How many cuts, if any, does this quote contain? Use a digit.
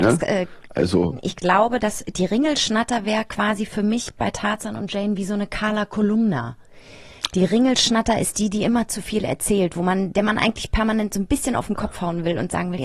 0